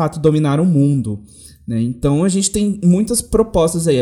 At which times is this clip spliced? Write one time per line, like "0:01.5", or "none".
none